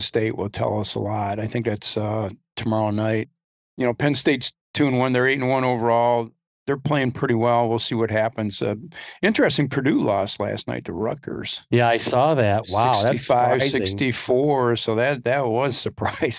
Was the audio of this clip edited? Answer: no; 0 cuts

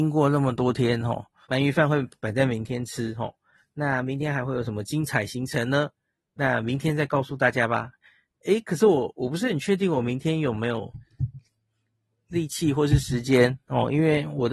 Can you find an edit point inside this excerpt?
yes; 1 cut; at 1.4 s

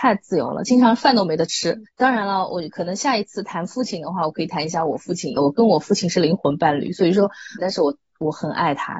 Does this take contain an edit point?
yes; 3 cuts; at 1.8 s, 5.4 s, 7.6 s

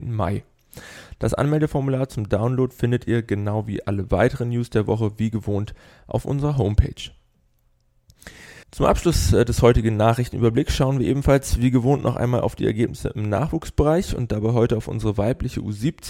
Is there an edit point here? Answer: yes; 1 cut; at 8.6 s

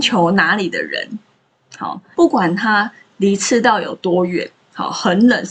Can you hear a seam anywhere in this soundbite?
yes; 1 cut; at 2.1 s

